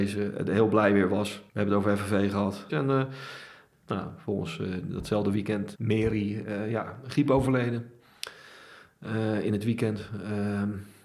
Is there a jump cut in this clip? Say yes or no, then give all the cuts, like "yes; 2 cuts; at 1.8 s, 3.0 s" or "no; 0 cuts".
yes; 3 cuts; at 1.5 s, 2.7 s, 5.7 s